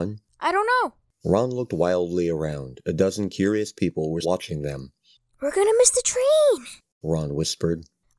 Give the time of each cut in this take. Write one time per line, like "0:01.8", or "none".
0:04.2